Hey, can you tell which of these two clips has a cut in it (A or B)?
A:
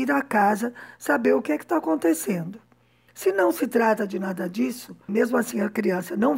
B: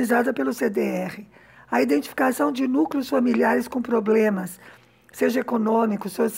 A